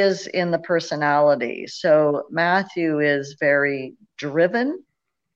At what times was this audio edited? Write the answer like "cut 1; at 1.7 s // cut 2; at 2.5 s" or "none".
none